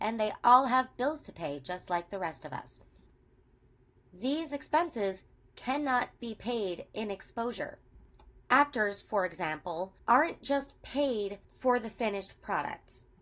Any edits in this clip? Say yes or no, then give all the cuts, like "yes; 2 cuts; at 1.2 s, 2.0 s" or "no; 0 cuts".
yes; 1 cut; at 8.4 s